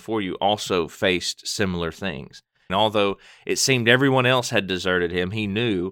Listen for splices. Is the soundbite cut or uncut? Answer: cut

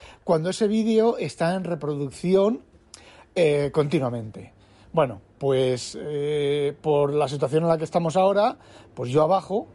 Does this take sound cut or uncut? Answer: uncut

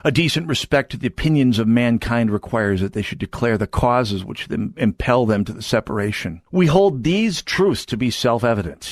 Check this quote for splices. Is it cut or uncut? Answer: cut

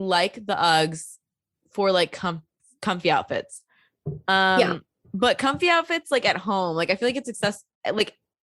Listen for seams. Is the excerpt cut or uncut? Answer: uncut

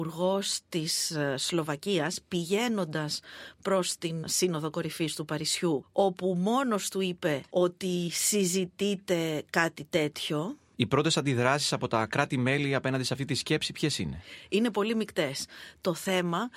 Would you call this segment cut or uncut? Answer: cut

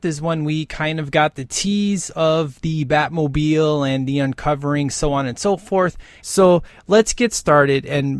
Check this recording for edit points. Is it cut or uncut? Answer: cut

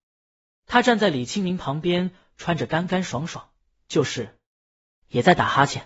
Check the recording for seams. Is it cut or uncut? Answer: uncut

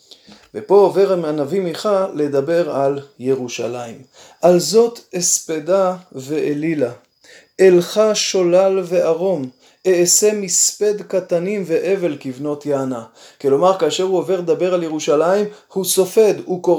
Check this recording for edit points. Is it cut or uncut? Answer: uncut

